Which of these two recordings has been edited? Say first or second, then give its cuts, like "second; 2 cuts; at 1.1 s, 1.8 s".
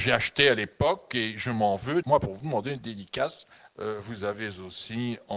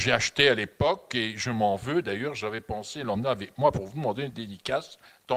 first; 2 cuts; at 2.0 s, 3.6 s